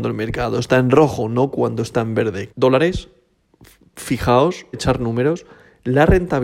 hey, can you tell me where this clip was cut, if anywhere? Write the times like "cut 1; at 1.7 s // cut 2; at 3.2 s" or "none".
cut 1; at 2.5 s // cut 2; at 4.7 s